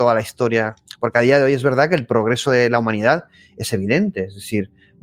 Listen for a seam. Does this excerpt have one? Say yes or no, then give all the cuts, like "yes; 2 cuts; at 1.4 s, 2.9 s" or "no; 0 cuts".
no; 0 cuts